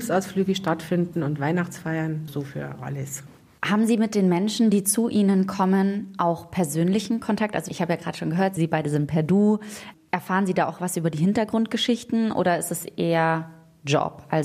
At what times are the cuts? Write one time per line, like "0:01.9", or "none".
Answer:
0:02.3